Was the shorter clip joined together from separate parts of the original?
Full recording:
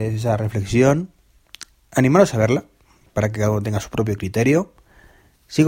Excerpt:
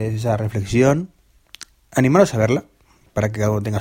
no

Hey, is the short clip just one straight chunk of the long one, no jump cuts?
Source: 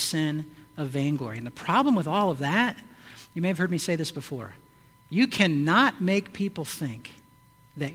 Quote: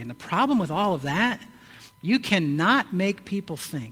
no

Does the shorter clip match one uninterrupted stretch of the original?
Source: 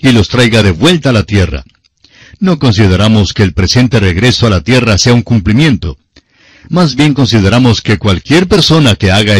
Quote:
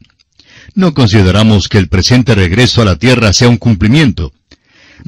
yes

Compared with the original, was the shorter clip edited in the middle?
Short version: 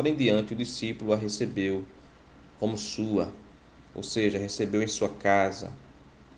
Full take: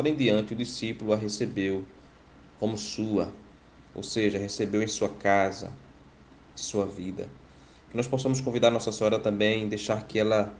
no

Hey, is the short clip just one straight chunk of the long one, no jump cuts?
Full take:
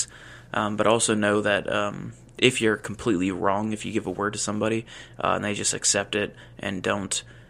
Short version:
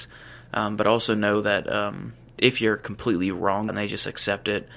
no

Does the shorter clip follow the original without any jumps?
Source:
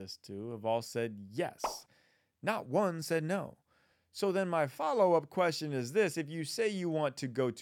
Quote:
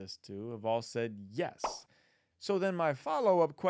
no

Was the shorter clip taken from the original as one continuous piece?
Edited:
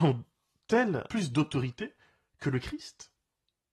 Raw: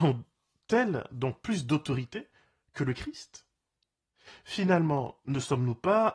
no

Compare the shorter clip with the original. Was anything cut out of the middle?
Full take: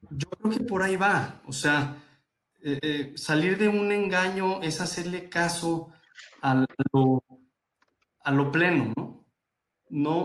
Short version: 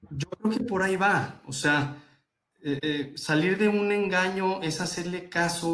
no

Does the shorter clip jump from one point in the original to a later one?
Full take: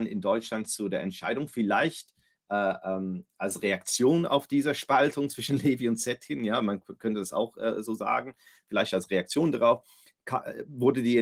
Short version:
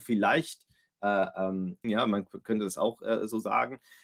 yes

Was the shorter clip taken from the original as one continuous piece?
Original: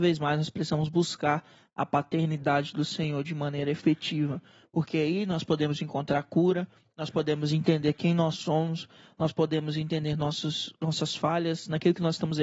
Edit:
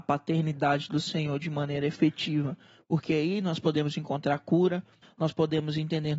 no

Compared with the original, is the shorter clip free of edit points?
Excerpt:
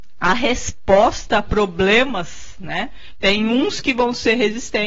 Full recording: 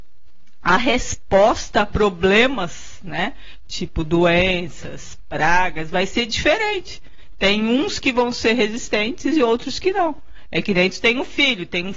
no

